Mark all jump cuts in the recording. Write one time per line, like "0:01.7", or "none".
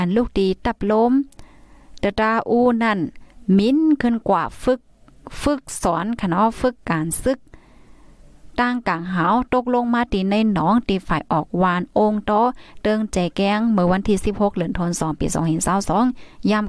0:06.8